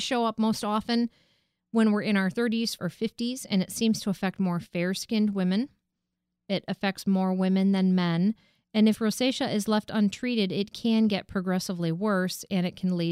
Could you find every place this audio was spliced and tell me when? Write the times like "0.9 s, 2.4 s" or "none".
2.8 s